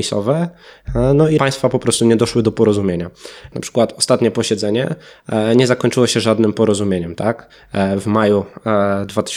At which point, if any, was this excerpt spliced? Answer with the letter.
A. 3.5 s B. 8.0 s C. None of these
A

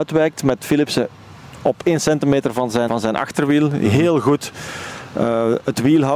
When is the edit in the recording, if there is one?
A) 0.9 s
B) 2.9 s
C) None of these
B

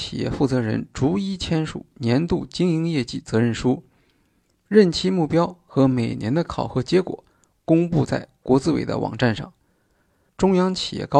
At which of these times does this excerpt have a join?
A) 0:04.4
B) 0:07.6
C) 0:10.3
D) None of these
C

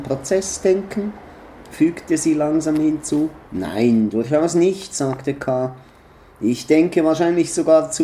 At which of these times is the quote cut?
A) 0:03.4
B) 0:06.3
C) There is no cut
A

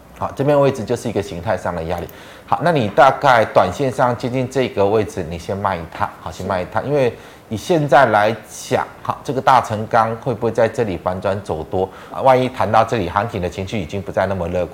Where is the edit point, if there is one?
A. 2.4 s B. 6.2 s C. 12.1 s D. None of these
C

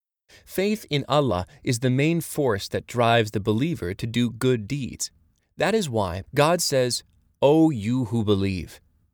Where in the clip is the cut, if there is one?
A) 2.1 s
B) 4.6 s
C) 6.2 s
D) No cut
C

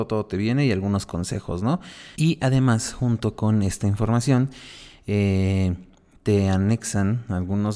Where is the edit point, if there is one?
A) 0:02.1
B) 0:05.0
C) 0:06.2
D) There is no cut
A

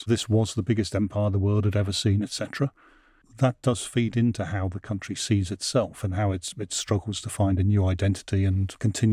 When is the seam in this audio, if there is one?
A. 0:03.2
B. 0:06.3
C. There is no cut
A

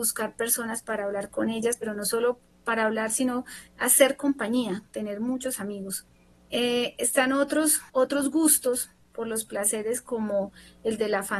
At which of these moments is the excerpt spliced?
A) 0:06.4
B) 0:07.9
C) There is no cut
B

